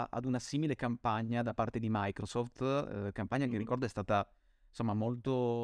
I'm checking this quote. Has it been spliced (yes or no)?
no